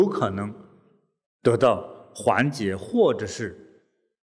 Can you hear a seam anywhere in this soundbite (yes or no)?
no